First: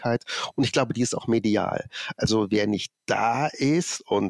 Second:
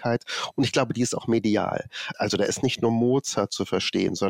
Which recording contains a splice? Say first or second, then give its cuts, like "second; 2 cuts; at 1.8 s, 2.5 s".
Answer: second; 1 cut; at 2.1 s